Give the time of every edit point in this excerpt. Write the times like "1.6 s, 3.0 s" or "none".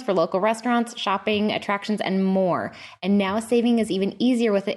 none